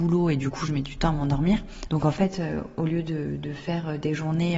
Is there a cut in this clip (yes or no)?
yes